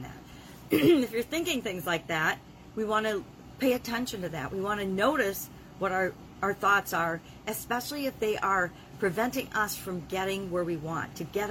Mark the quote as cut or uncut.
uncut